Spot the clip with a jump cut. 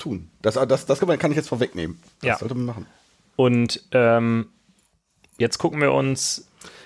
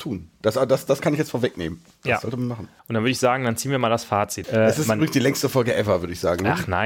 second; 3 cuts; at 1.0 s, 2.8 s, 4.4 s

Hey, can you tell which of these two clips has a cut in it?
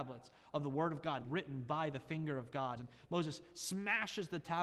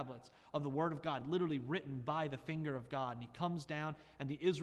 first; 2 cuts; at 1.2 s, 2.8 s

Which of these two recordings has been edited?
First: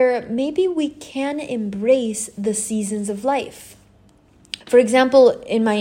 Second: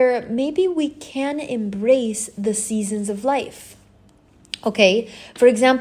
first; 1 cut; at 4.6 s

